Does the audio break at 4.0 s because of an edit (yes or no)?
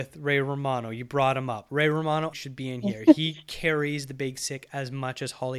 no